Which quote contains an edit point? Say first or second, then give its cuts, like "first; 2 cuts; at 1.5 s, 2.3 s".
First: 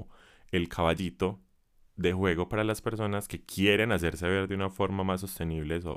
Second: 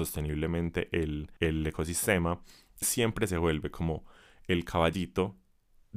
second; 2 cuts; at 1.4 s, 2.8 s